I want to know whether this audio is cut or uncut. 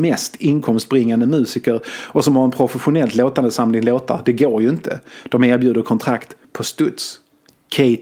uncut